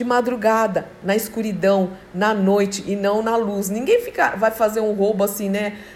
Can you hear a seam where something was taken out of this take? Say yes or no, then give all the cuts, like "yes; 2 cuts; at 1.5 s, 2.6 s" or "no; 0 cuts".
no; 0 cuts